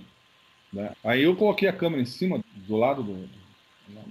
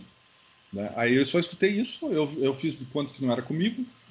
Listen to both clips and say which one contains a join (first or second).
first